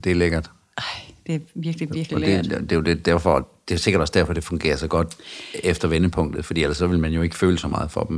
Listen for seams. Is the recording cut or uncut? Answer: uncut